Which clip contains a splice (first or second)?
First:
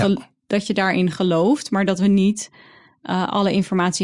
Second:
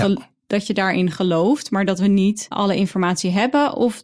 second